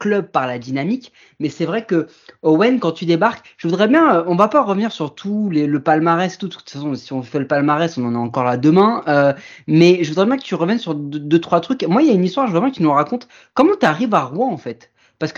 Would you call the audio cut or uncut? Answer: uncut